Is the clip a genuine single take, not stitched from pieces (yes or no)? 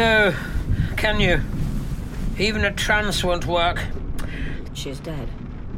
no